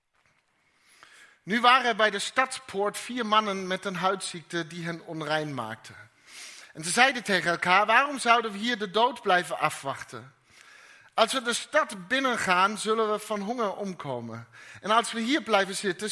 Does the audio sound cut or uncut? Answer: uncut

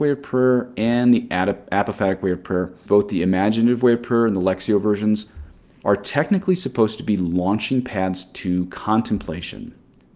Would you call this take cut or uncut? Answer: cut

